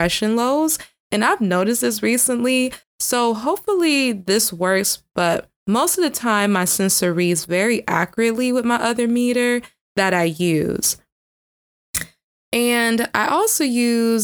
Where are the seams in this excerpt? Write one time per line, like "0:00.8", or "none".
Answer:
0:02.8